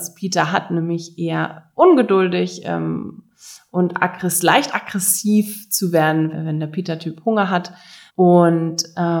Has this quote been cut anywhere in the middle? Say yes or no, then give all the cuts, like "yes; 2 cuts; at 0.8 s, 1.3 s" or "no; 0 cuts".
yes; 2 cuts; at 6.3 s, 8.1 s